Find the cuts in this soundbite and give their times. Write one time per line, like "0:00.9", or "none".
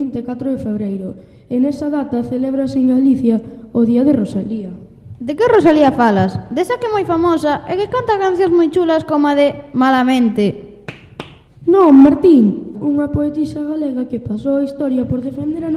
0:11.5
0:12.7